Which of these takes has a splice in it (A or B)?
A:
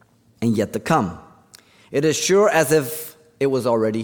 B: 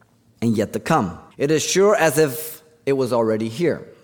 B